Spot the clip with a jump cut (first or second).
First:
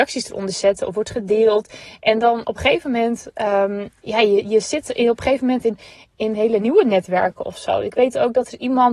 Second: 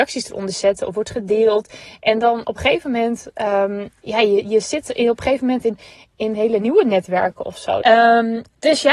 second